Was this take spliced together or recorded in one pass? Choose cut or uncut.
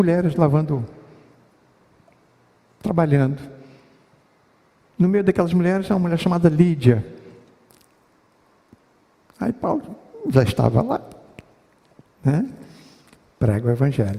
uncut